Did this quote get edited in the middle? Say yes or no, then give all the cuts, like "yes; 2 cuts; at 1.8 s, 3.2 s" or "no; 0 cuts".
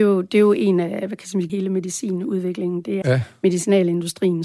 yes; 2 cuts; at 1.5 s, 3.0 s